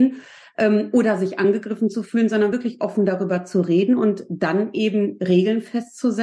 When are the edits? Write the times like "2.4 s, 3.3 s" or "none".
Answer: none